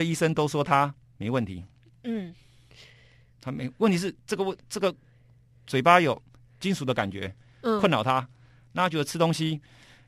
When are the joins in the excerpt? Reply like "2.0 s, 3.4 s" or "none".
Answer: none